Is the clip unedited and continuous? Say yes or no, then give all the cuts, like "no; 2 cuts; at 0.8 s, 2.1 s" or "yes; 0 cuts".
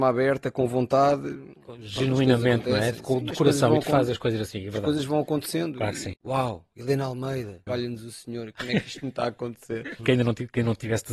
no; 3 cuts; at 6.1 s, 7.7 s, 10.0 s